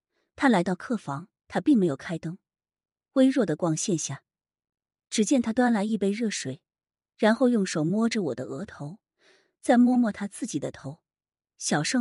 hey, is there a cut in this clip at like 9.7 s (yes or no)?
no